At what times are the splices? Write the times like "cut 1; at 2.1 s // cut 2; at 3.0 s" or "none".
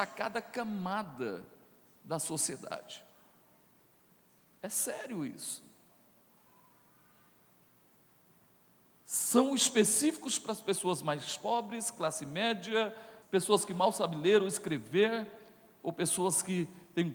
cut 1; at 13.2 s